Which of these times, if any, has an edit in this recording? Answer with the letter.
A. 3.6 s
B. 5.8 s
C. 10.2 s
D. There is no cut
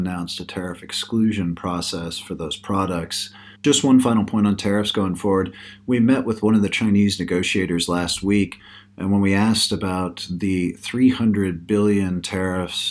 A